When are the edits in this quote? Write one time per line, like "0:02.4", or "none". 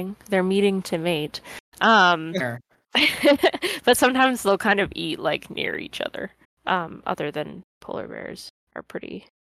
0:02.4
0:06.4